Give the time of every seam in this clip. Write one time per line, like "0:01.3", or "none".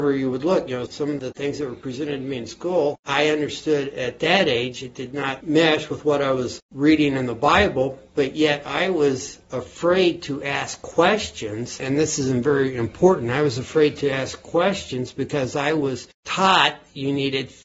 none